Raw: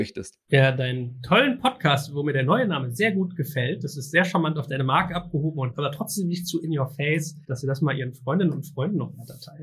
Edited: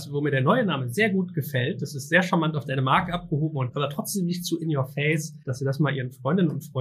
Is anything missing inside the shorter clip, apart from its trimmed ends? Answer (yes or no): no